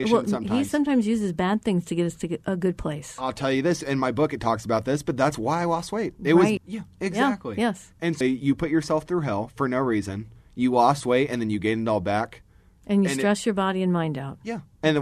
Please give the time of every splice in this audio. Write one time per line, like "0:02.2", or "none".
0:06.6
0:08.2